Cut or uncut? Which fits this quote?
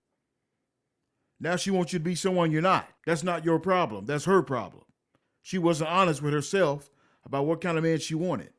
uncut